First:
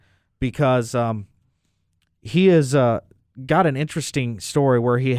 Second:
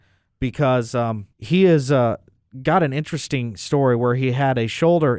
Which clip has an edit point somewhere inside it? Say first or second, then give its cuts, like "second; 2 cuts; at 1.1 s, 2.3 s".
second; 1 cut; at 1.3 s